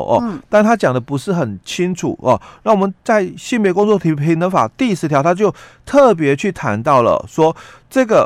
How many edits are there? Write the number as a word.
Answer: zero